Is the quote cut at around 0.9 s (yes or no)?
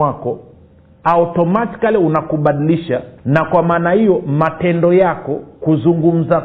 no